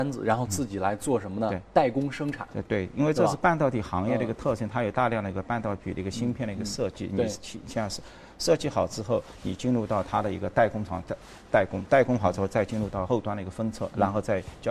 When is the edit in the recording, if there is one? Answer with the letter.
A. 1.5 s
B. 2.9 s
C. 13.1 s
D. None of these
C